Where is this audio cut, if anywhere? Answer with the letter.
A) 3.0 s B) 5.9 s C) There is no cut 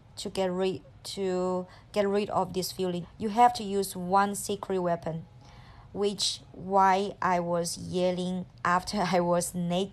A